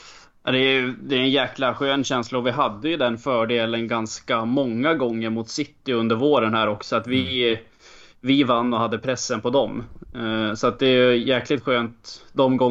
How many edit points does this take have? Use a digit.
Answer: 0